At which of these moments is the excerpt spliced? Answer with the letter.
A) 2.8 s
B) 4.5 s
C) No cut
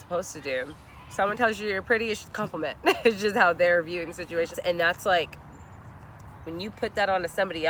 B